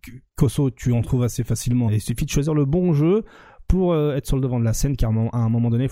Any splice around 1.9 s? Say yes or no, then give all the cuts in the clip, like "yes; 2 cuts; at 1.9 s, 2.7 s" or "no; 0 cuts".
yes; 1 cut; at 1.9 s